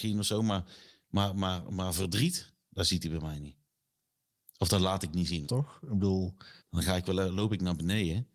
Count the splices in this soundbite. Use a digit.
2